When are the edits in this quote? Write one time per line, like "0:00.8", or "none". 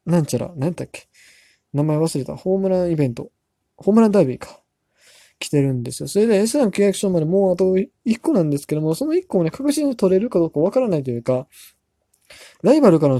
none